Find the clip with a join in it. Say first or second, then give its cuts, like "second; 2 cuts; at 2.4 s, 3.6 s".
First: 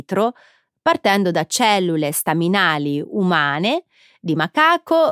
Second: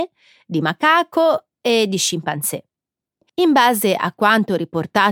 second; 1 cut; at 3.3 s